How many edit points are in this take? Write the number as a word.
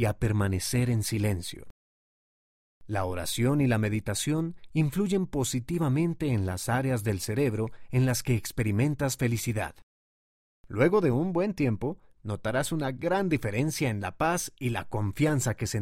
one